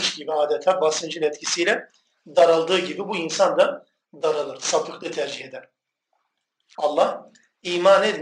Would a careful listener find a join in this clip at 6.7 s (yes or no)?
yes